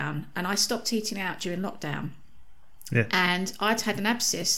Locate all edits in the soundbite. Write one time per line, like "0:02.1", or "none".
none